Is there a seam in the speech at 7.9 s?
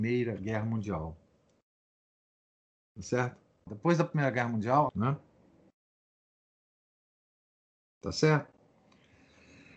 no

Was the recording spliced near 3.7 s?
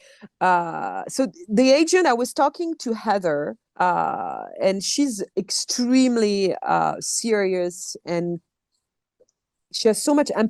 yes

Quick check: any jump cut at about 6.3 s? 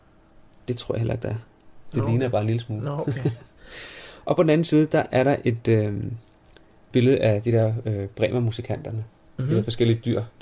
no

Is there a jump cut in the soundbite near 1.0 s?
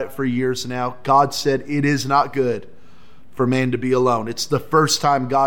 no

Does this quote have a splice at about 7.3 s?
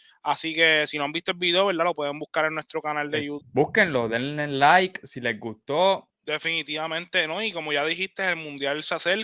no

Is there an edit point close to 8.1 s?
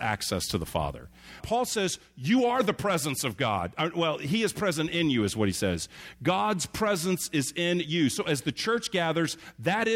no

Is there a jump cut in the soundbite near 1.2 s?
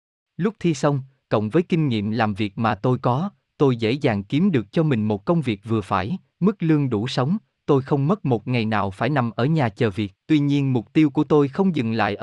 yes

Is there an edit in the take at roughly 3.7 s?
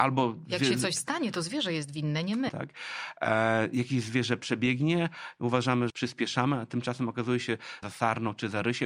no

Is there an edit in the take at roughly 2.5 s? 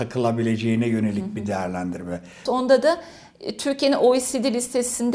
yes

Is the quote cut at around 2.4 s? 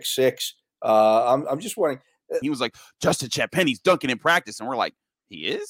yes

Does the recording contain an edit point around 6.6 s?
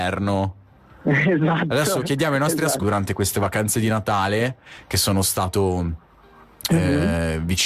no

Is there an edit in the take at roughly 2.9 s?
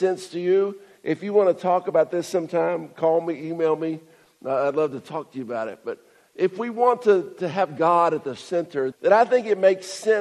no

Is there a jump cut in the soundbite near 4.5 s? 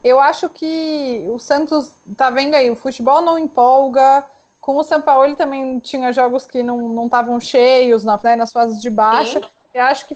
no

